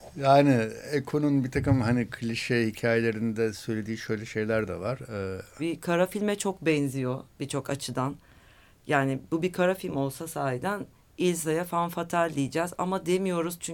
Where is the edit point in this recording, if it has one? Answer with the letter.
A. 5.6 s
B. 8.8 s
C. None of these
A